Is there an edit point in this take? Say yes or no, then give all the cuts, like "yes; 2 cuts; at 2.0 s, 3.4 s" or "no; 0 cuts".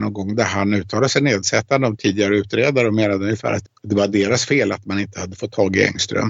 yes; 1 cut; at 3.7 s